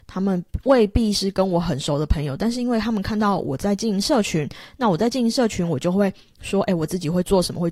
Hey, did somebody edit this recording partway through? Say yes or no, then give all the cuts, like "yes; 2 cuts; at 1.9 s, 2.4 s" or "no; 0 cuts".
no; 0 cuts